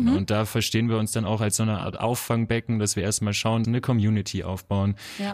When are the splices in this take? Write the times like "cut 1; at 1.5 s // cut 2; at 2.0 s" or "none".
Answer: cut 1; at 3.6 s